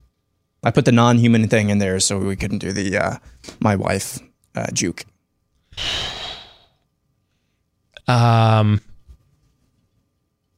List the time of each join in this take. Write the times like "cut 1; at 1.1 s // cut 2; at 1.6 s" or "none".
cut 1; at 5.8 s